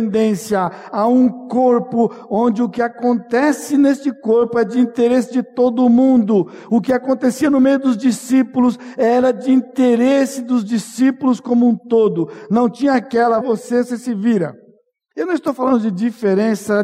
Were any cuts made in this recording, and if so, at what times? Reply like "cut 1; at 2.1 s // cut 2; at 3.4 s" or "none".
cut 1; at 13.4 s // cut 2; at 15.1 s

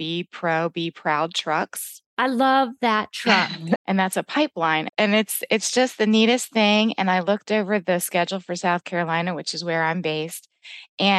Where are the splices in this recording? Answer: cut 1; at 3.8 s // cut 2; at 4.9 s

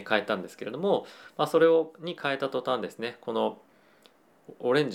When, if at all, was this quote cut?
none

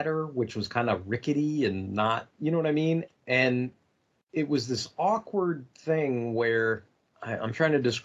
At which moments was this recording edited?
cut 1; at 3.1 s

